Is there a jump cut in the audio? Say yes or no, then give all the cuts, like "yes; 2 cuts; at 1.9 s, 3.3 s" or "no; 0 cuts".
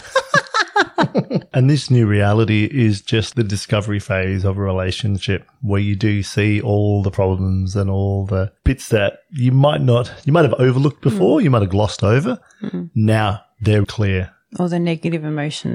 yes; 2 cuts; at 3.3 s, 13.8 s